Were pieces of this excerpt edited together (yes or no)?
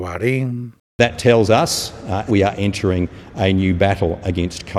yes